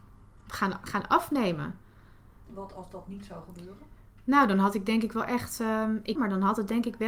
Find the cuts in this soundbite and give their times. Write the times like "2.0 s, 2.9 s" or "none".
6.2 s